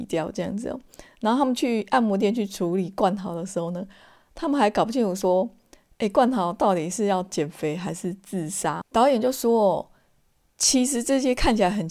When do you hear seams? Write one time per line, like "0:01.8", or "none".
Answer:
0:08.8